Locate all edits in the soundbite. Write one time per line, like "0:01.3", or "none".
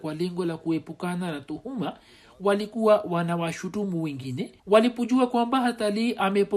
0:04.6